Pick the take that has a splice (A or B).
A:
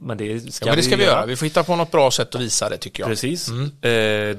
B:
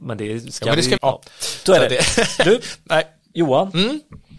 B